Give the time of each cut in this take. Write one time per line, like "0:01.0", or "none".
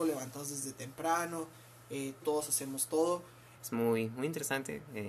0:02.2
0:03.6